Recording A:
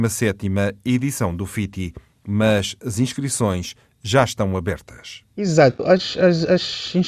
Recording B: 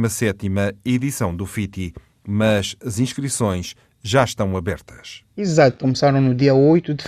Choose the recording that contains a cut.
B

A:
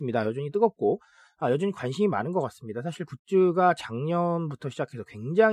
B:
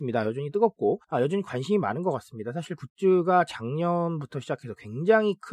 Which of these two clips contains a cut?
B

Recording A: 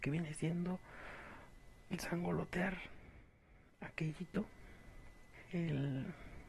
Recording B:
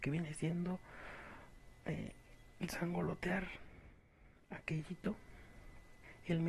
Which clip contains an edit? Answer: A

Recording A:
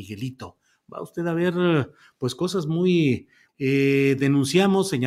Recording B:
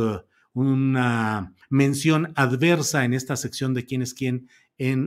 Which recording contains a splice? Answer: A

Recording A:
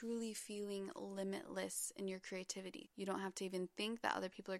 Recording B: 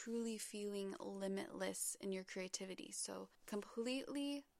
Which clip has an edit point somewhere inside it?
A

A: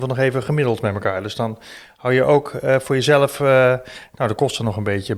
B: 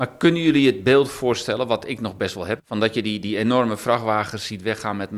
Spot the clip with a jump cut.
B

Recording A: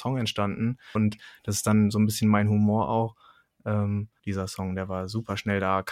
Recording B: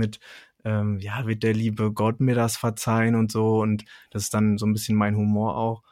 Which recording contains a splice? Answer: A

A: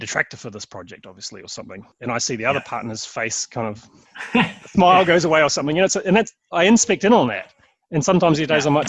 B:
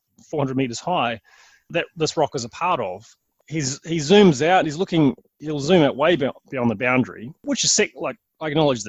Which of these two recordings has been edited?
B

